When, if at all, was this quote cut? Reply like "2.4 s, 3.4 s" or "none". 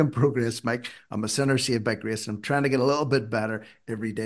none